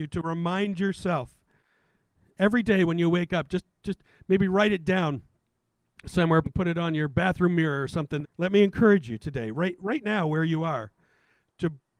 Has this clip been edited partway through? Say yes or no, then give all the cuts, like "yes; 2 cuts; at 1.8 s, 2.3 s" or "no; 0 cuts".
yes; 2 cuts; at 6.4 s, 8.2 s